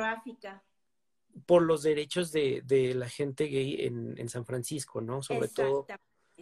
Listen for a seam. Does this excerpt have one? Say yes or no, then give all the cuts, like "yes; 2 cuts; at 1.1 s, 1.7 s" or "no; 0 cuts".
no; 0 cuts